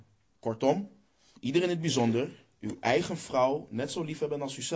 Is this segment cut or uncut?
cut